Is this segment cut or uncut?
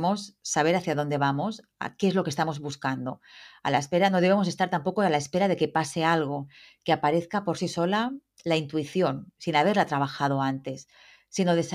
uncut